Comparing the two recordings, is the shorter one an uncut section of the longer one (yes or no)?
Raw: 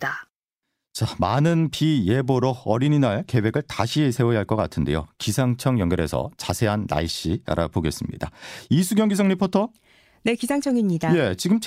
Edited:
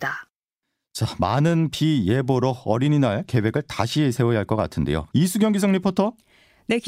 no